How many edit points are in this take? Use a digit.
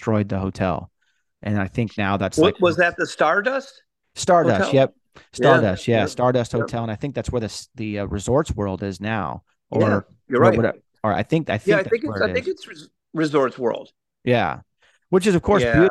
0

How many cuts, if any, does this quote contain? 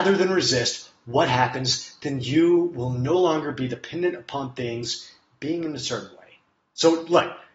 0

